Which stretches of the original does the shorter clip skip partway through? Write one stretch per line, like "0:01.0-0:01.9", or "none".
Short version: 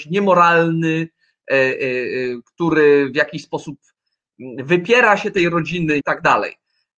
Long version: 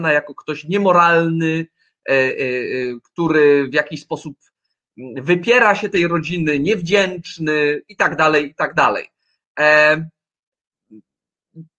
0:06.6-0:08.5